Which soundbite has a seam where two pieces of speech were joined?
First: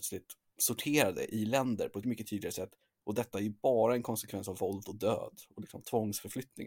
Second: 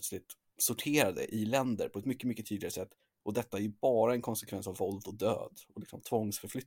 first; 1 cut; at 2.0 s

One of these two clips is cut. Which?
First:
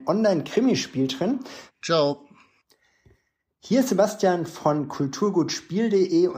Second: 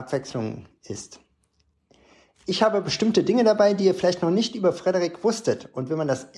first; 1 cut; at 1.7 s

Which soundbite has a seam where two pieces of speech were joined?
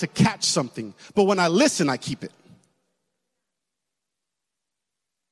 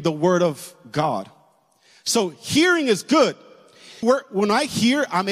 second; 1 cut; at 4.0 s

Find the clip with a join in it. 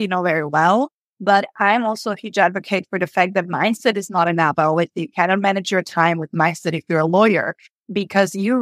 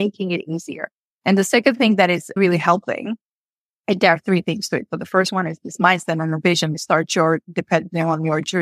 second; 1 cut; at 6.7 s

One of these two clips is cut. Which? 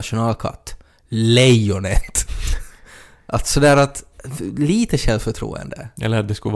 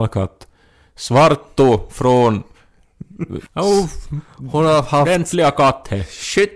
second; 1 cut; at 3.5 s

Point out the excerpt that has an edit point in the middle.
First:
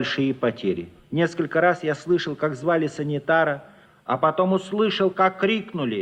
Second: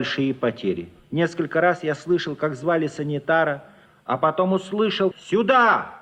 second; 1 cut; at 5.1 s

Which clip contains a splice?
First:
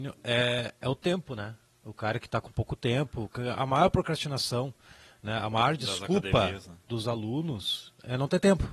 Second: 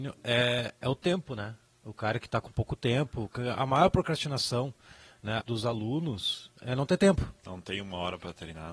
second; 1 cut; at 5.4 s

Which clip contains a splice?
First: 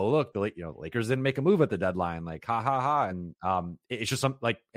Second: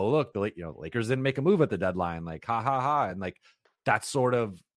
first; 1 cut; at 3.1 s

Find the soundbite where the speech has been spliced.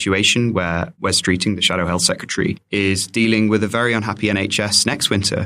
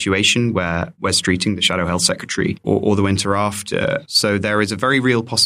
second; 2 cuts; at 2.6 s, 4.0 s

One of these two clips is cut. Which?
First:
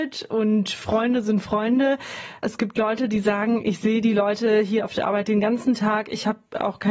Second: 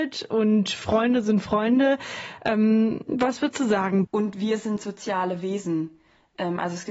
second; 2 cuts; at 2.4 s, 4.0 s

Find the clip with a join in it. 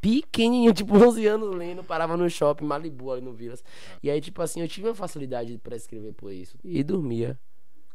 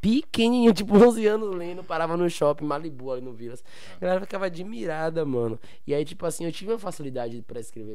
first; 2 cuts; at 4.0 s, 6.6 s

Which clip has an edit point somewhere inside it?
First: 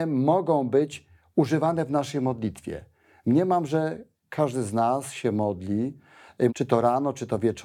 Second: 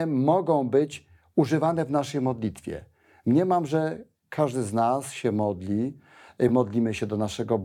first; 1 cut; at 6.5 s

